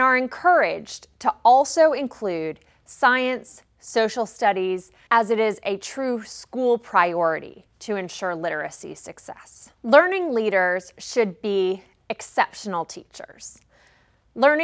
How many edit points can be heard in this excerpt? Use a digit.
2